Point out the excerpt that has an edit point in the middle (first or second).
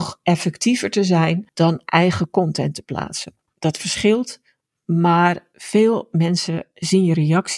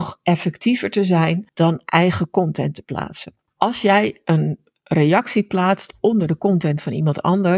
first